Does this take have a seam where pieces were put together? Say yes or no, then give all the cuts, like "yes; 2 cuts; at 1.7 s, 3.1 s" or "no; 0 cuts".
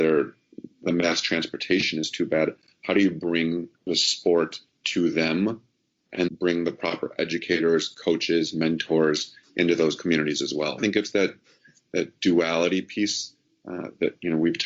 yes; 3 cuts; at 3.7 s, 6.3 s, 10.8 s